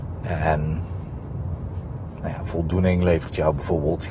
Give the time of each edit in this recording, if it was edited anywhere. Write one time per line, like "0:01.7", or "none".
none